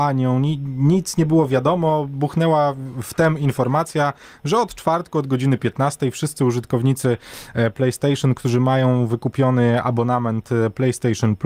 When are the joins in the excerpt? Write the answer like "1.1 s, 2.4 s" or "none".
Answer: none